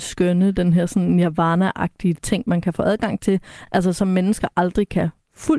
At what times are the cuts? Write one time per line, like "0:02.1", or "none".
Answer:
none

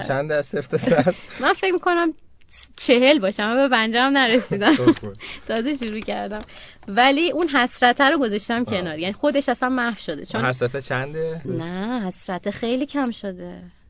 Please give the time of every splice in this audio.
0:11.4

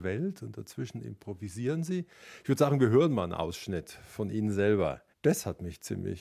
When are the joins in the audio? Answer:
0:05.1

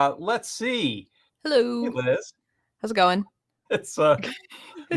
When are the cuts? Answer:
0:01.3
0:03.7

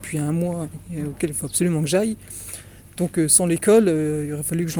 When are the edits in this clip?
none

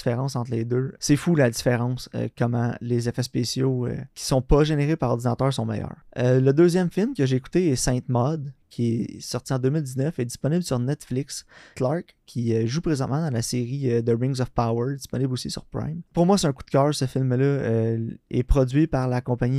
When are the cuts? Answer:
0:11.7

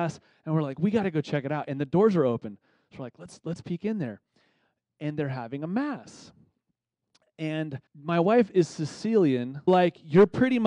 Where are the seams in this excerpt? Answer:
0:07.9
0:09.7

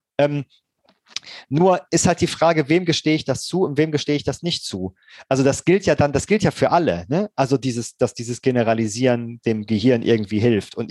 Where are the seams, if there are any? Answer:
none

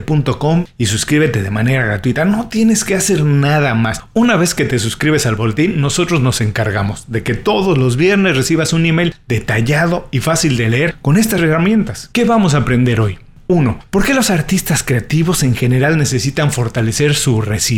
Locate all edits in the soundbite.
0:12.1

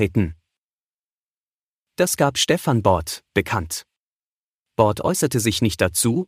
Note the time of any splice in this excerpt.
0:03.3

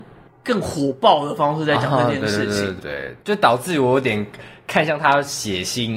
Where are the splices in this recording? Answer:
0:02.8

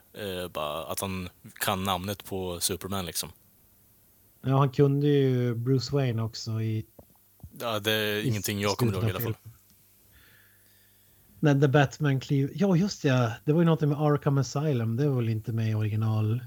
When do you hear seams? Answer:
0:07.5

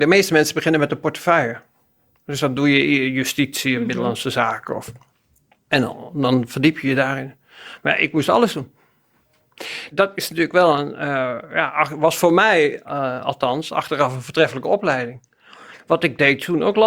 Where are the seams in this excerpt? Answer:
none

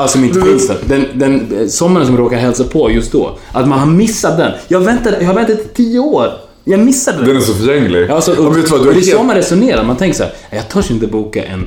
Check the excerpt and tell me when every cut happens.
none

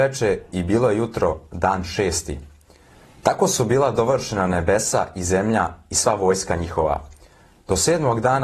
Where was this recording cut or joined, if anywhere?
none

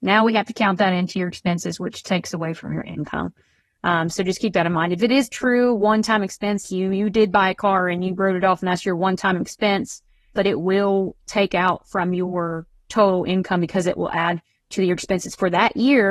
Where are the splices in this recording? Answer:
0:06.6
0:10.4

